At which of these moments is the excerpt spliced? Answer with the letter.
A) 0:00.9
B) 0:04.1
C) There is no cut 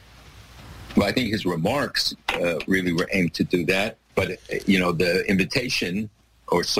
B